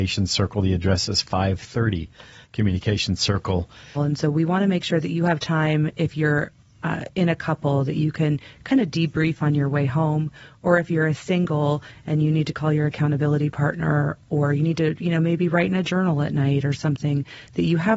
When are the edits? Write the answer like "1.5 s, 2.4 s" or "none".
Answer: 3.9 s